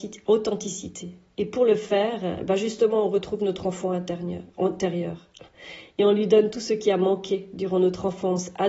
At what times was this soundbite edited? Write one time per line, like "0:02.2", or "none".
none